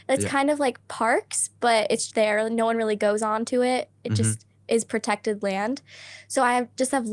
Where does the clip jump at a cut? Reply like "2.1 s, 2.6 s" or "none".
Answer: 2.1 s